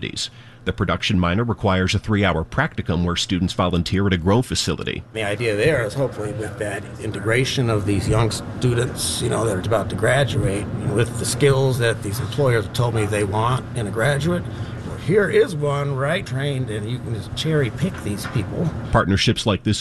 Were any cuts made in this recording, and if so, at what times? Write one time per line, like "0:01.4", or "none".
0:09.6
0:16.2